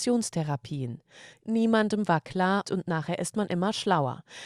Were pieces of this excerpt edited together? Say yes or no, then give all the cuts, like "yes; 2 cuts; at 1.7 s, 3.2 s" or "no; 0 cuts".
yes; 2 cuts; at 1.3 s, 2.6 s